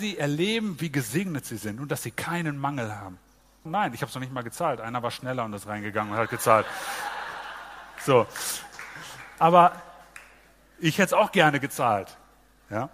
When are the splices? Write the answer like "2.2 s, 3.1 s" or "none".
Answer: 3.7 s